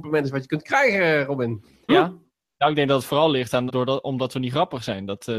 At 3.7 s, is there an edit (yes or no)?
yes